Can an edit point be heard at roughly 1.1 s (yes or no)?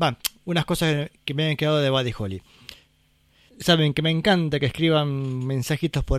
no